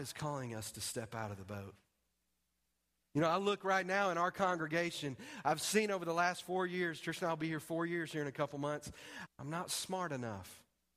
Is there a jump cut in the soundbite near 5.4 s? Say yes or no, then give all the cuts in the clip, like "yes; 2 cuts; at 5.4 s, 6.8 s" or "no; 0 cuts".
no; 1 cut; at 9.3 s